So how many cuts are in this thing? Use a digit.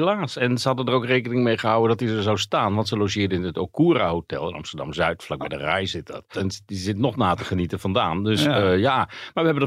1